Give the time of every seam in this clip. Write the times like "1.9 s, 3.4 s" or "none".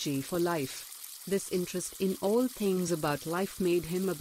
1.2 s